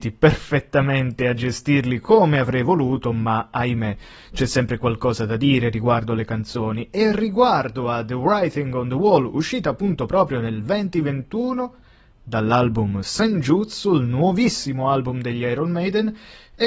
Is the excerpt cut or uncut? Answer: uncut